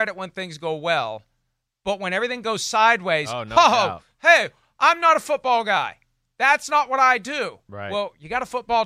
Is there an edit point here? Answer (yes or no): no